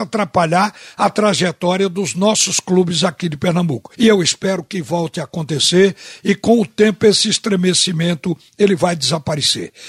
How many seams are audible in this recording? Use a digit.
1